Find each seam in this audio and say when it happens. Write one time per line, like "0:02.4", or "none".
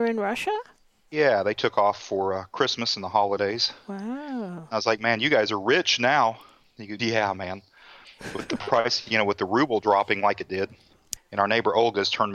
0:07.0
0:11.2